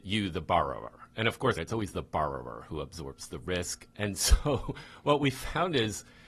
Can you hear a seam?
yes; 2 cuts; at 1.6 s, 3.9 s

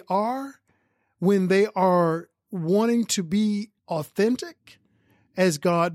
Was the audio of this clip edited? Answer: yes; 2 cuts; at 2.4 s, 3.8 s

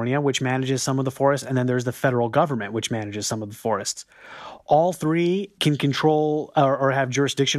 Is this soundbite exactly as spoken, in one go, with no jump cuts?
yes; 0 cuts

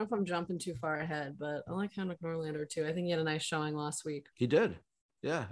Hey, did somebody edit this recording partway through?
no; 0 cuts

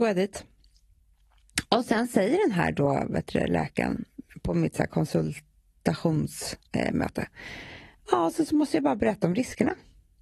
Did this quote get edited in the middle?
yes; 1 cut; at 6.7 s

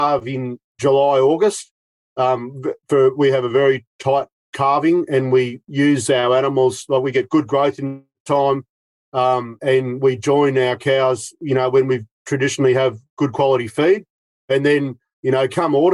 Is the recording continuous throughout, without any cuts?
yes; 0 cuts

